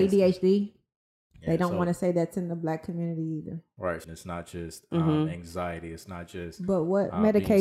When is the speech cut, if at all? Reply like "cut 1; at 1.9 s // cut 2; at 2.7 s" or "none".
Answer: cut 1; at 4.0 s